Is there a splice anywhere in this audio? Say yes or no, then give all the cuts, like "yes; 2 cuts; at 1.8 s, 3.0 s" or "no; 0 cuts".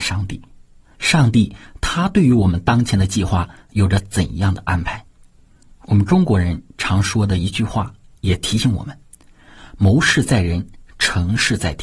yes; 1 cut; at 0.9 s